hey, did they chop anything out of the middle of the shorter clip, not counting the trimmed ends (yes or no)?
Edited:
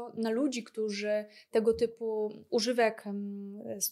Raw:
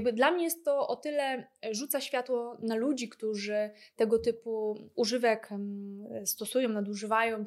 no